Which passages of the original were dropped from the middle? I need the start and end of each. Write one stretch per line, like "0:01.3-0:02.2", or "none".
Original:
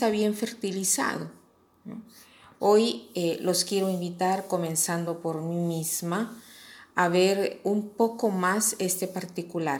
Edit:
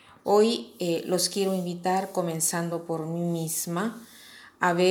none